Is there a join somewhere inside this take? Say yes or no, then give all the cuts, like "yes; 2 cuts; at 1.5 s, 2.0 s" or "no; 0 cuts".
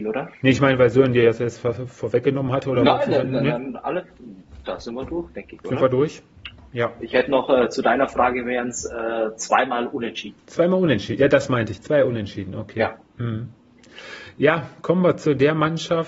no; 0 cuts